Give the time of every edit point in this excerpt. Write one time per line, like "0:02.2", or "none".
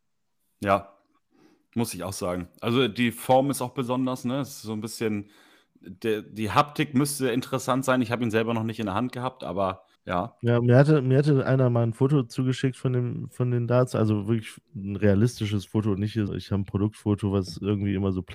0:09.9
0:16.3